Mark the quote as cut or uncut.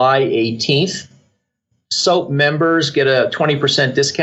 uncut